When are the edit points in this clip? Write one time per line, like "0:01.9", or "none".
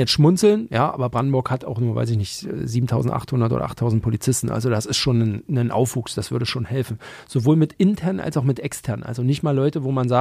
none